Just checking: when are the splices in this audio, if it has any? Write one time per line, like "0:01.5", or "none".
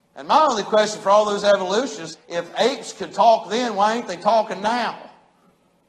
0:02.1